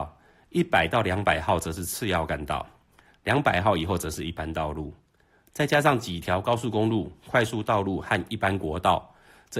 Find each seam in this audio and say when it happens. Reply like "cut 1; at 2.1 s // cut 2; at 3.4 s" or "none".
none